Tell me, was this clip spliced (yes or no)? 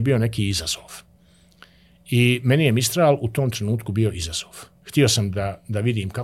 no